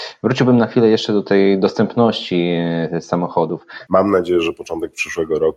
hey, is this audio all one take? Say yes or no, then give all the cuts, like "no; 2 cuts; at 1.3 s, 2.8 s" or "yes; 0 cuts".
no; 1 cut; at 3.9 s